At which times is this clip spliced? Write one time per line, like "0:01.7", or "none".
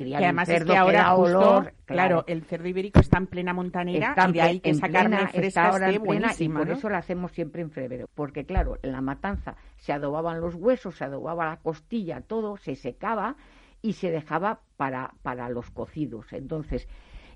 0:08.1